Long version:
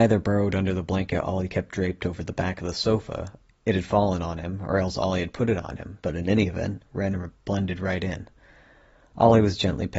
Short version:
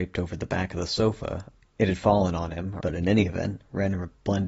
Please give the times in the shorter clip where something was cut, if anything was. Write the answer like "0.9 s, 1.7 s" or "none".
2.8 s